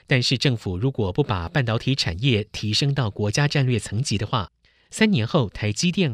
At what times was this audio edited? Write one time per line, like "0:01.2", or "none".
none